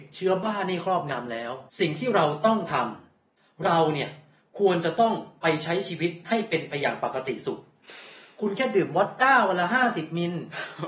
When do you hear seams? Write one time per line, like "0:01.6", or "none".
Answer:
0:01.7

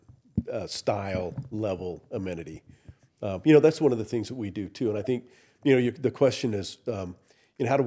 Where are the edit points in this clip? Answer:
none

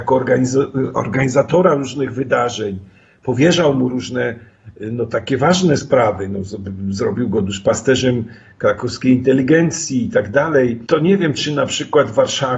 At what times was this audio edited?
none

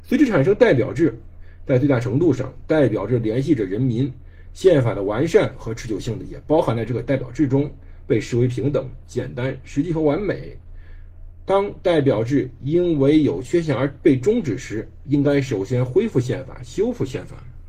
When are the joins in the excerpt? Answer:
0:04.5

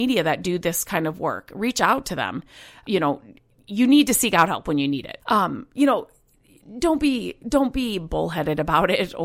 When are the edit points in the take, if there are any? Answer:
0:02.8
0:05.2

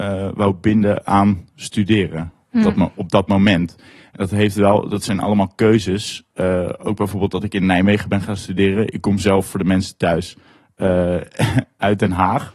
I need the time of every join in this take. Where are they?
none

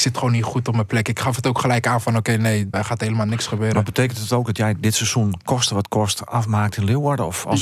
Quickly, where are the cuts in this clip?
0:02.7

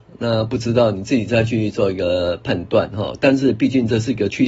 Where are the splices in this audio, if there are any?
none

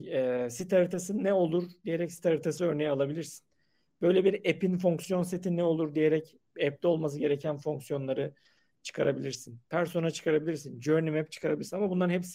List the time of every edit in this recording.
none

